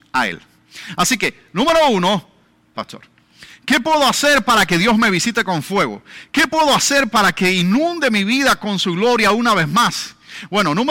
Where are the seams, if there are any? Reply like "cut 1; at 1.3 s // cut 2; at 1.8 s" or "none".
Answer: cut 1; at 2.7 s